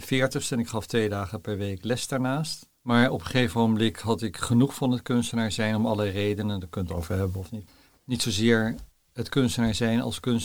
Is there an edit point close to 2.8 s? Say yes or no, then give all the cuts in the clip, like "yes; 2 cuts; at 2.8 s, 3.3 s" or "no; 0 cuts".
yes; 1 cut; at 2.8 s